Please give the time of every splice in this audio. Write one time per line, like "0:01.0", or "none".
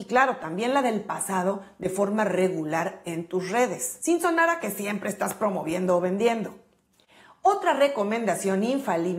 none